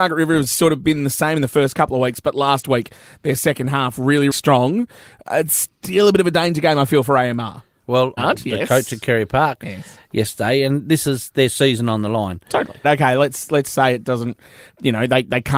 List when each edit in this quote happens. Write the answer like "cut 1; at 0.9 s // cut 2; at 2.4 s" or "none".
cut 1; at 4.3 s // cut 2; at 8.2 s // cut 3; at 12.8 s